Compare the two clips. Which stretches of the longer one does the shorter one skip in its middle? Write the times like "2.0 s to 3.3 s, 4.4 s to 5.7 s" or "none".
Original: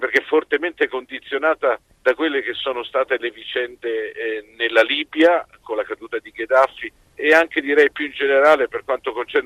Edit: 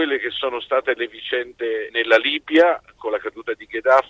4.1 s to 4.5 s